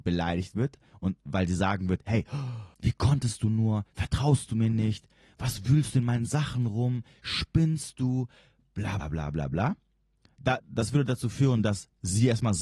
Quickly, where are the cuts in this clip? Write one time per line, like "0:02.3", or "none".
0:02.7
0:09.0
0:10.6